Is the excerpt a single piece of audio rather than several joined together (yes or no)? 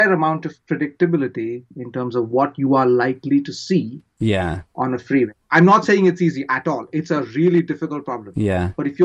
yes